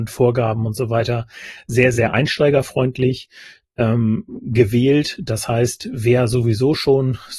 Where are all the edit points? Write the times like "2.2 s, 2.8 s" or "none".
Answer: none